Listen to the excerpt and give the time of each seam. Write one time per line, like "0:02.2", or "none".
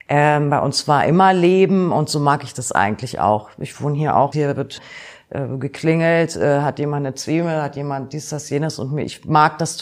0:04.3